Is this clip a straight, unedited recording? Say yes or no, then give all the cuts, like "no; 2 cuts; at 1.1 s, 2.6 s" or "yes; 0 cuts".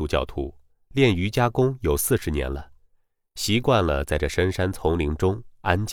yes; 0 cuts